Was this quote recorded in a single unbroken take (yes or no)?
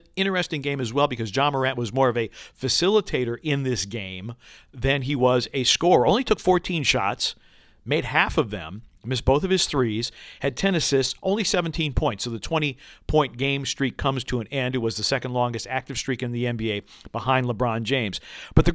yes